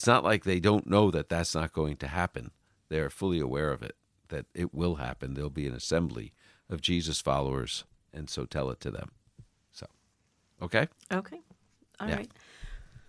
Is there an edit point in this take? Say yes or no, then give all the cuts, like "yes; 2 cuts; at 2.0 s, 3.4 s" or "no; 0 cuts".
no; 0 cuts